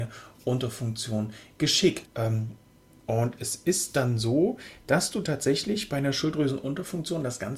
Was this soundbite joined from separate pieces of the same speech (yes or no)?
yes